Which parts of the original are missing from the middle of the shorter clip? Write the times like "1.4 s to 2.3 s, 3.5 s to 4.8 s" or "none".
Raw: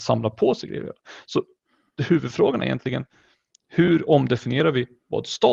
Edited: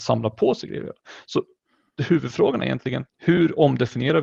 3.1 s to 3.6 s

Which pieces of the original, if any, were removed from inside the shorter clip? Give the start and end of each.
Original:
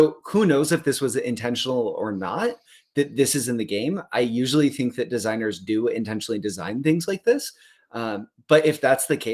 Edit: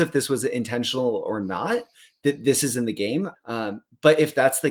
4.1 s to 7.8 s

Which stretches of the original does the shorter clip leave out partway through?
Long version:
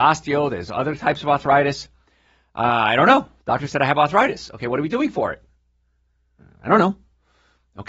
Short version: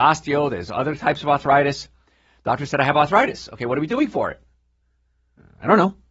2.4 s to 3.4 s

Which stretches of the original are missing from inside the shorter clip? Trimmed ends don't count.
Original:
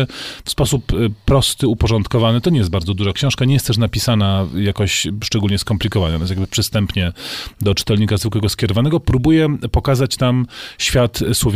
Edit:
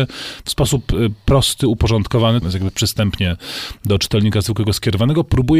2.4 s to 6.2 s

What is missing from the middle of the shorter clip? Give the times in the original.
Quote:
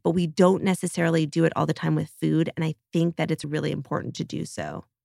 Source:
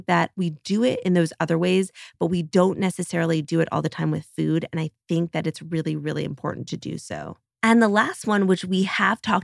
5.6 s to 6.0 s

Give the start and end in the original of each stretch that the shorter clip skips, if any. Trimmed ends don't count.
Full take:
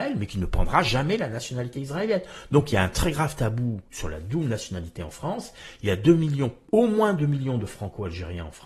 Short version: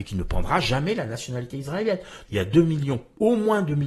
2.5 s to 5.8 s

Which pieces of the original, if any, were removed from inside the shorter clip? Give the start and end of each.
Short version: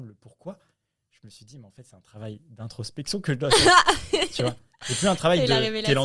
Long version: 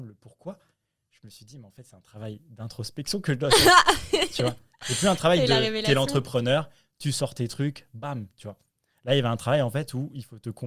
none

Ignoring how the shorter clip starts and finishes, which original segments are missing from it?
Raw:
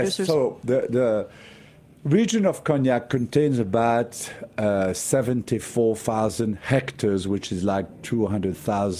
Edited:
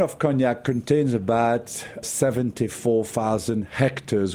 4.5 s to 4.9 s

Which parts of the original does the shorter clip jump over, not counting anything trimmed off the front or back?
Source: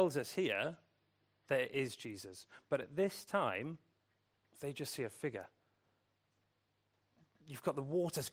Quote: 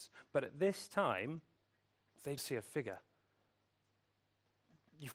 4.7 s to 4.9 s

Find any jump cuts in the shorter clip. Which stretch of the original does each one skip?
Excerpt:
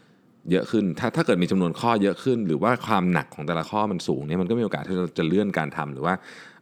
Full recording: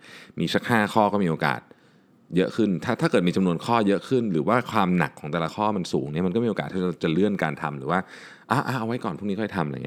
none

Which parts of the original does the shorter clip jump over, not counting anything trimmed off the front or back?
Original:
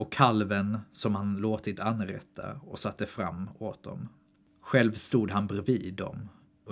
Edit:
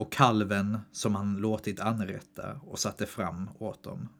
none

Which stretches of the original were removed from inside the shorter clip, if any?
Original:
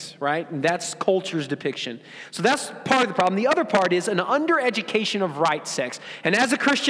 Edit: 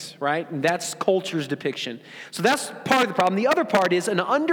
none

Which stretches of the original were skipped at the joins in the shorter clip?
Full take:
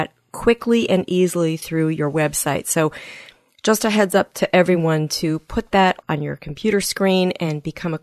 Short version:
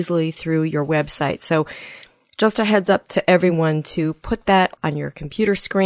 none

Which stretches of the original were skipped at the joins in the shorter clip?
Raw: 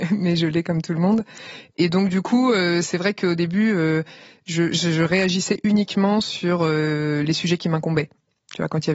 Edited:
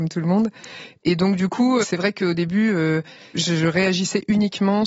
2.5 s to 2.8 s, 4.3 s to 4.7 s

